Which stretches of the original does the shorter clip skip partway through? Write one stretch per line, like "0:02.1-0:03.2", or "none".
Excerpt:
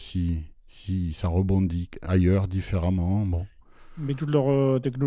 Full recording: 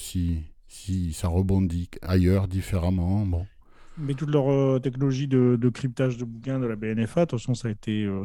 none